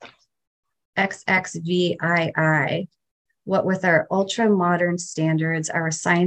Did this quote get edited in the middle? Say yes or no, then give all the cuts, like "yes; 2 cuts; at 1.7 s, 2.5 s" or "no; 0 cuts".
no; 0 cuts